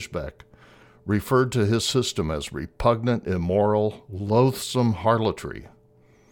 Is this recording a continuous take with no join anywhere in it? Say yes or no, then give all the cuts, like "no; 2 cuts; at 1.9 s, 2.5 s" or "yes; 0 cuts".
yes; 0 cuts